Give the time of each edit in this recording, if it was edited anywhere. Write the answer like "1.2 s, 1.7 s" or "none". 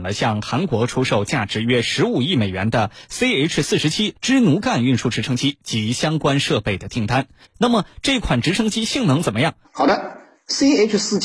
7.4 s, 9.6 s